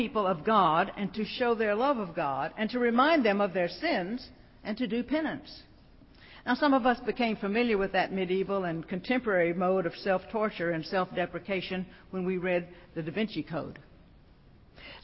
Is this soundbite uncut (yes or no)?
yes